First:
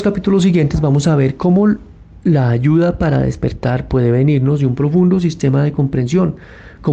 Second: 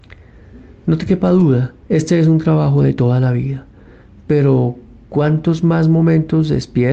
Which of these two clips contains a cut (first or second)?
second